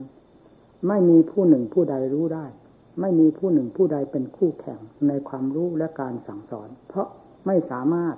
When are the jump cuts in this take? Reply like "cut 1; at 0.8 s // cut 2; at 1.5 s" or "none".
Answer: cut 1; at 6.8 s